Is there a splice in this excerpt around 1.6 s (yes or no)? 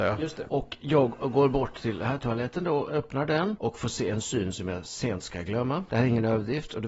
no